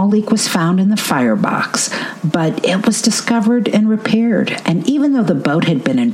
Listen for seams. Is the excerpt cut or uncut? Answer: cut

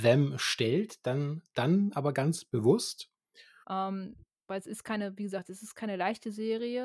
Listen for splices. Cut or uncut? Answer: cut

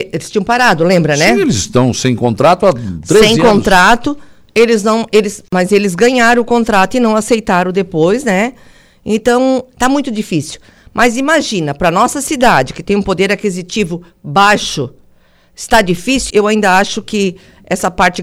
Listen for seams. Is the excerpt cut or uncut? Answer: cut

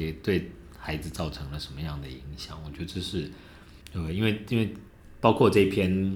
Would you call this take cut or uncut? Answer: cut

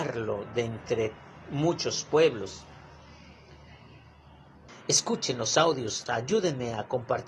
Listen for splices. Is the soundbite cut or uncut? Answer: cut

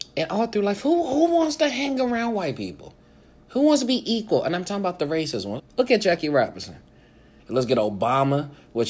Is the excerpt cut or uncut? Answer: cut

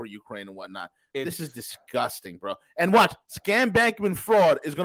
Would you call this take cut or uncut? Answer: uncut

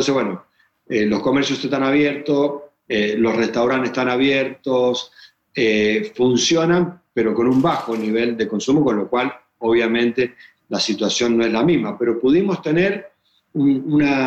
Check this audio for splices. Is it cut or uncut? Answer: uncut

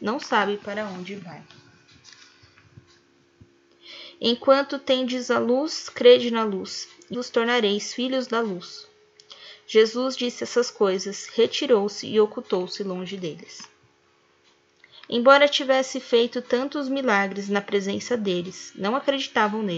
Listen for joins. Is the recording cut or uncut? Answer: cut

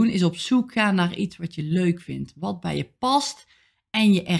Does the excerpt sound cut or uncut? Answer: uncut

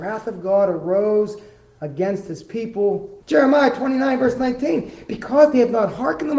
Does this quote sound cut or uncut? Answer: cut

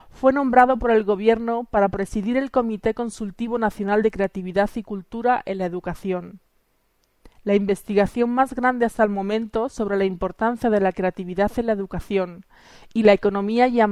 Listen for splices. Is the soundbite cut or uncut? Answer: uncut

